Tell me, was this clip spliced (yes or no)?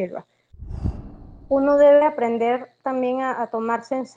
no